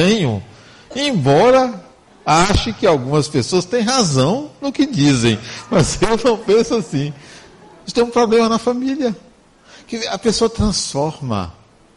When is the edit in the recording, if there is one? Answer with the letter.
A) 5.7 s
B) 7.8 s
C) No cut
B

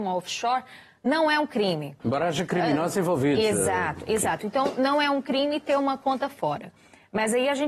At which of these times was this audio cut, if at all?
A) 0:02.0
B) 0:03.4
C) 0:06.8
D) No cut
A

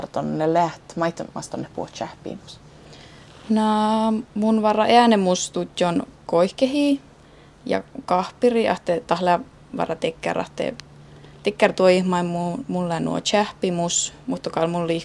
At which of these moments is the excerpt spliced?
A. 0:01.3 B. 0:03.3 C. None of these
A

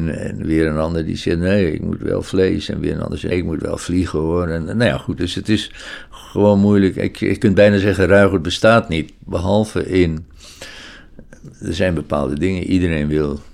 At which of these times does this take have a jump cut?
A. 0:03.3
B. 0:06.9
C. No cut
A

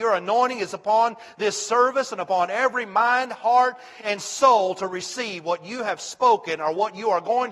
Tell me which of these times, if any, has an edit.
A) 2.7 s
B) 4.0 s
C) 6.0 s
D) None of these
B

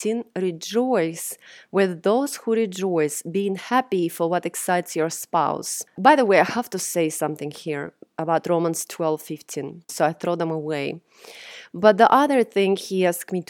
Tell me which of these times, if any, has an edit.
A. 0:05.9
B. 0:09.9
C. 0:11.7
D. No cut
B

